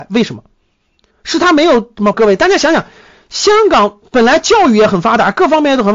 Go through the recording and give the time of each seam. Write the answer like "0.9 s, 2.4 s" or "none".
1.1 s, 2.1 s